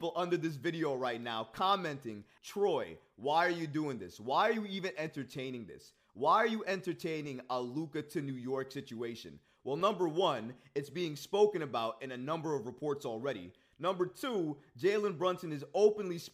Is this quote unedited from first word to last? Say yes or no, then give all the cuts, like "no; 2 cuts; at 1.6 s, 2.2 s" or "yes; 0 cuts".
no; 1 cut; at 2.4 s